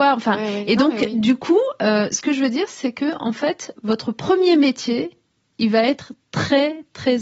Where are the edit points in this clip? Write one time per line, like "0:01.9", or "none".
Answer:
none